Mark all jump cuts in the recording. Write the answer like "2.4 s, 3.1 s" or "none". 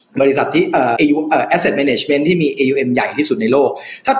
1.0 s